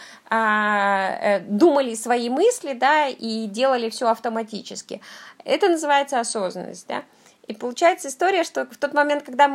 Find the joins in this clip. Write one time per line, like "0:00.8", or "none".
none